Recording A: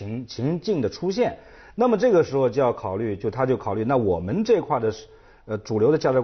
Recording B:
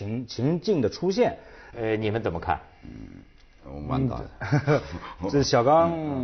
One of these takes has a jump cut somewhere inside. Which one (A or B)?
B